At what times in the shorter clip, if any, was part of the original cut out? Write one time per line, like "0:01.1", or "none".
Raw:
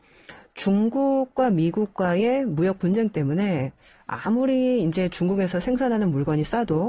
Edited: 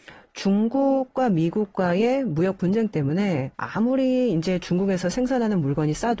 0:03.5